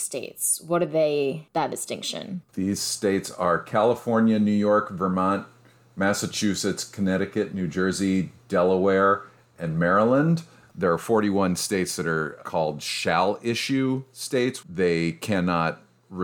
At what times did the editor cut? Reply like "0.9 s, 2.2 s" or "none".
10.7 s, 14.6 s